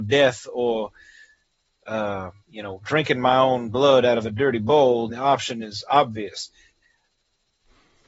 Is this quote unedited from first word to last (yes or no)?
no